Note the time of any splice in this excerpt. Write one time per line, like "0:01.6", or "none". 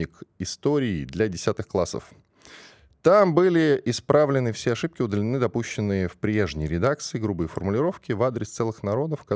none

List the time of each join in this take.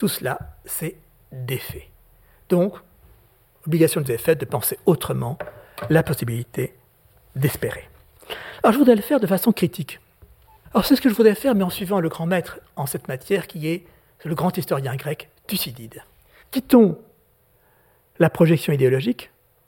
0:10.6
0:16.4

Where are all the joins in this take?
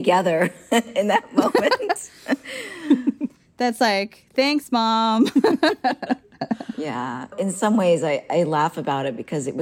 0:07.3

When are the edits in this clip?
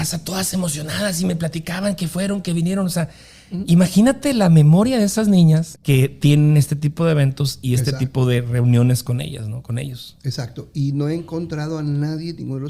0:05.7

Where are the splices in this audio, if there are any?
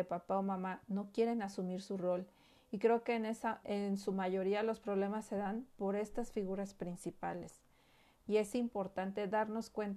0:03.6
0:08.2

